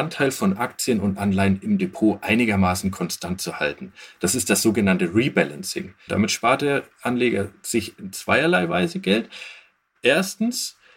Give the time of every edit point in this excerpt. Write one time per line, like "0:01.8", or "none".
0:06.1